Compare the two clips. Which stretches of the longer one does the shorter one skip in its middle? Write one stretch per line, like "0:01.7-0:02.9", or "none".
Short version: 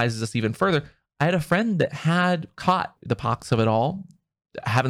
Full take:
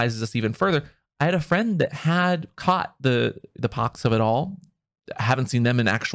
0:03.0-0:03.5